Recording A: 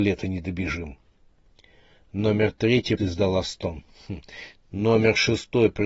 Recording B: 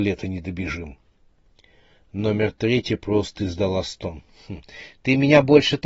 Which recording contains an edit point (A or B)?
A